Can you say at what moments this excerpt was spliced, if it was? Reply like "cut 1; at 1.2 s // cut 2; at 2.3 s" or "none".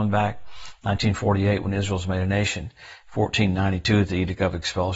none